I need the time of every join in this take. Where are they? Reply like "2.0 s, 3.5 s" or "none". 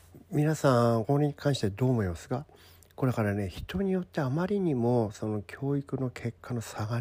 1.0 s